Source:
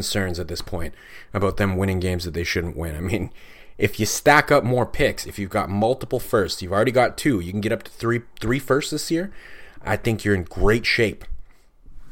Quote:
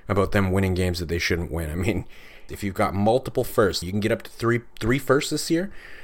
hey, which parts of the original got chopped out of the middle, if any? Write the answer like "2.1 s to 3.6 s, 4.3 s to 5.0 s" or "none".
3.7 s to 5.2 s, 6.6 s to 7.4 s

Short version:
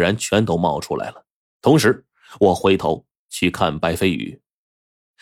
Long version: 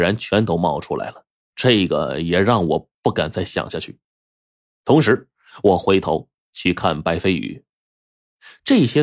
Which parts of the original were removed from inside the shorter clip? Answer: 1.4 s to 4.6 s

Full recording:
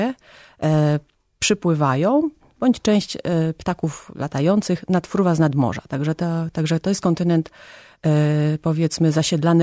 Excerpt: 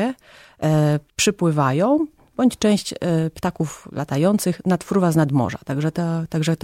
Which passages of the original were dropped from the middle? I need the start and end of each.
1.1 s to 1.3 s

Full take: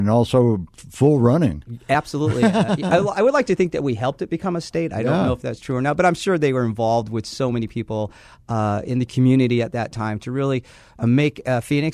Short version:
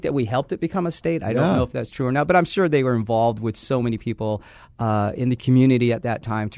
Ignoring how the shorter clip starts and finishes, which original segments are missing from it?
none

